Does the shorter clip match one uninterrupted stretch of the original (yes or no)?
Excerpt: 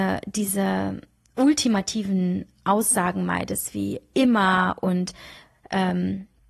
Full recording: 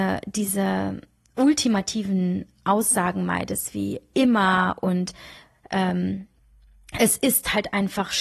yes